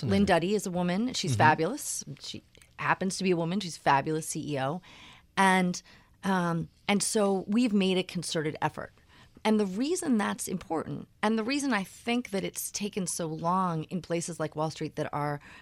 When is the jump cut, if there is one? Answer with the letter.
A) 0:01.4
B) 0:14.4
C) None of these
C